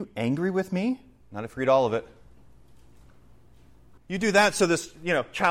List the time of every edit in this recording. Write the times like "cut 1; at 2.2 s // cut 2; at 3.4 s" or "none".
cut 1; at 1.2 s // cut 2; at 4.0 s